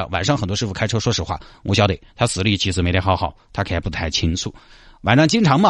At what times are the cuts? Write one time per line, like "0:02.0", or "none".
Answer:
none